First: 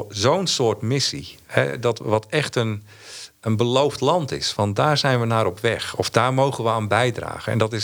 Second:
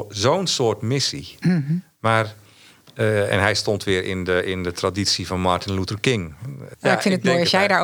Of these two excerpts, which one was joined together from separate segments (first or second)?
second